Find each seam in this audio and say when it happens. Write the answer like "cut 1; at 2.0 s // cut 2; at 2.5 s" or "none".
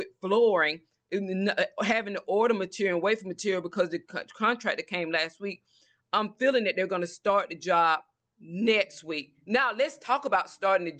none